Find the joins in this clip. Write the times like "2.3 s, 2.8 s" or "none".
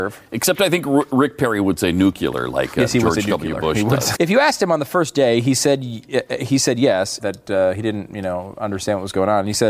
4.1 s, 7.2 s

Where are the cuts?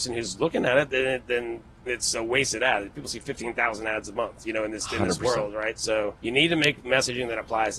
1.9 s, 6.2 s

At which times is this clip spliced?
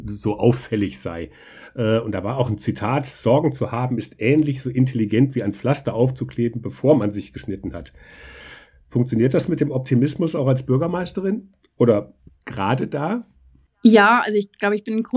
none

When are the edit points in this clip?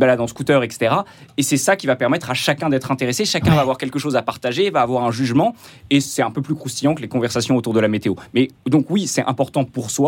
none

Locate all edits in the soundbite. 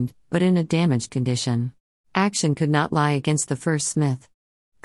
2.0 s

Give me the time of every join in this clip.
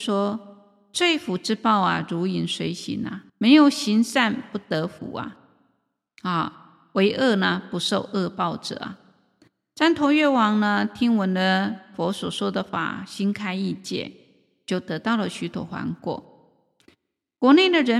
3.3 s

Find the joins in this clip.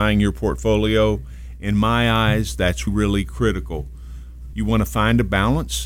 2.9 s, 4.5 s

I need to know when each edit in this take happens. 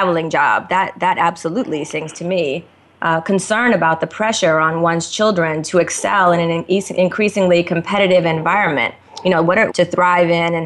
9.7 s

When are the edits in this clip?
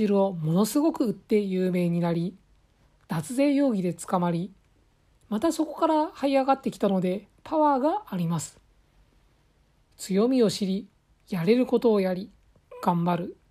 none

